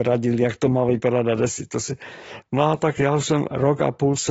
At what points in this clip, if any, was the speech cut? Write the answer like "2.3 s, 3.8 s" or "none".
2.4 s